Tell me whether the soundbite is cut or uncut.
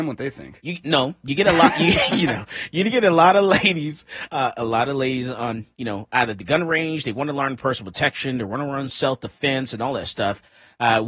uncut